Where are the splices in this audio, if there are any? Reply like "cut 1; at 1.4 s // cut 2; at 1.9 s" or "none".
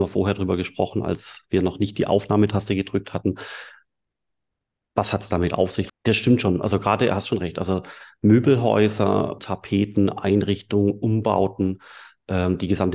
cut 1; at 5.9 s // cut 2; at 9.4 s

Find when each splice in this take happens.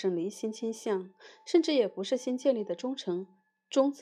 none

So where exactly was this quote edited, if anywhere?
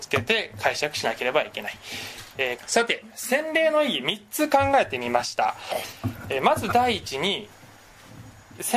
cut 1; at 2.6 s

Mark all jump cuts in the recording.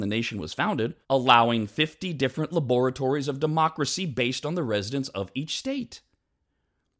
cut 1; at 1.0 s

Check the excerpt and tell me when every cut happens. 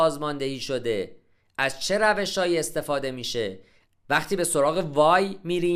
cut 1; at 3.9 s

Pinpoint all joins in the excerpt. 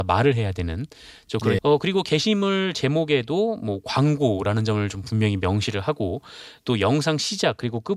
cut 1; at 1.6 s

